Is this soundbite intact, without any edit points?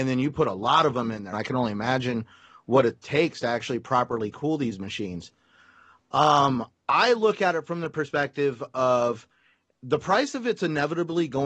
no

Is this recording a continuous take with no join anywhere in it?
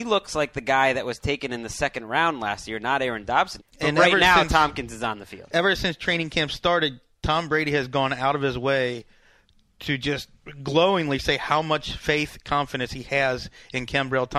no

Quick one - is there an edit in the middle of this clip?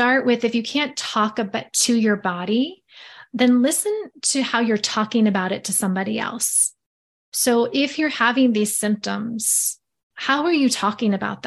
yes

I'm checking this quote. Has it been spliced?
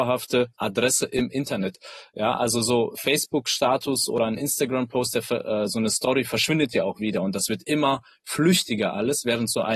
no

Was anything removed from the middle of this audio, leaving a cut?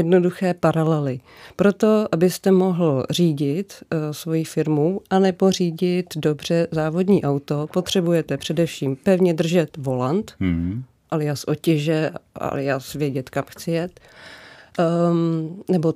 no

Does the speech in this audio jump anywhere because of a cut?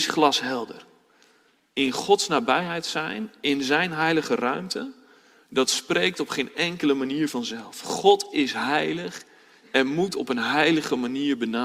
no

